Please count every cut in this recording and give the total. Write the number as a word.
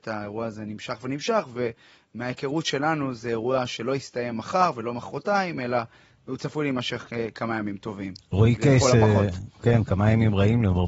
zero